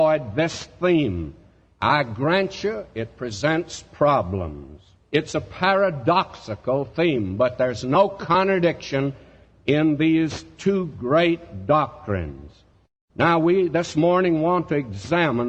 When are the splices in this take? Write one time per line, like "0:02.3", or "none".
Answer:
none